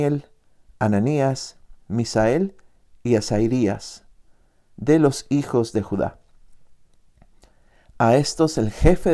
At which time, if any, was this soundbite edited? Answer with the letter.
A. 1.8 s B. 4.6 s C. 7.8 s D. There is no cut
D